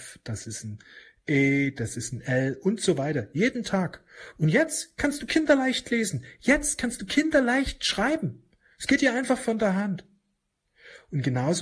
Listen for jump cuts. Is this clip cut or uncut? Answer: cut